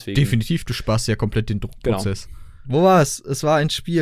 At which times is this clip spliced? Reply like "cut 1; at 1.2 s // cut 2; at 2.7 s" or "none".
cut 1; at 2.6 s

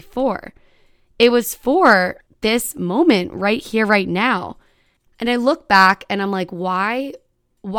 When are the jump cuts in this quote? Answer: cut 1; at 5.1 s

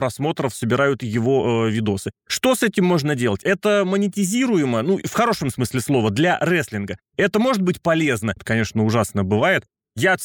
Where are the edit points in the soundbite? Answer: cut 1; at 8.4 s

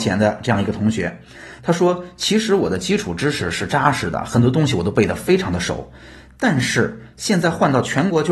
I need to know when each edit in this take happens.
cut 1; at 1.6 s

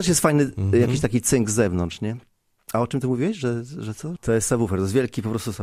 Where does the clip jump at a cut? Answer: cut 1; at 4.2 s

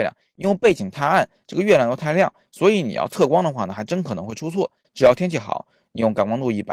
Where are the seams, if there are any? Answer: cut 1; at 4.8 s

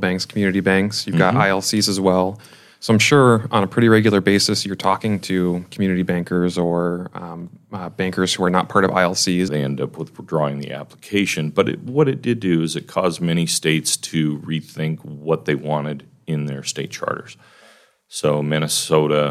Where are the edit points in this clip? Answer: cut 1; at 9.5 s

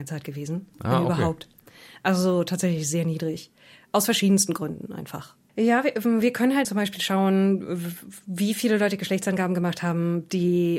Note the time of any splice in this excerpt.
cut 1; at 5.5 s // cut 2; at 6.6 s

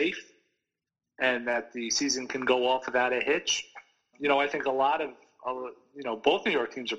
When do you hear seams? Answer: cut 1; at 4.1 s

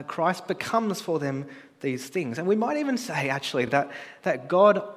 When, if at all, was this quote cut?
none

